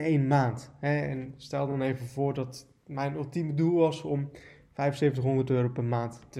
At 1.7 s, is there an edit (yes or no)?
no